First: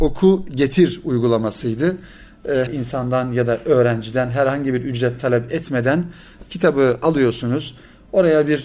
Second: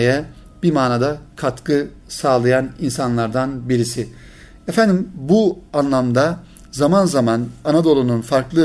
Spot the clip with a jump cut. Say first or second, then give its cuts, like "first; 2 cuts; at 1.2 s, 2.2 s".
first; 1 cut; at 2.7 s